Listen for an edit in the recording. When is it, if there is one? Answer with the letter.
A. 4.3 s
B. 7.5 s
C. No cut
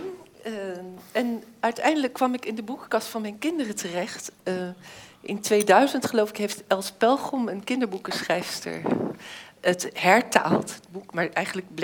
C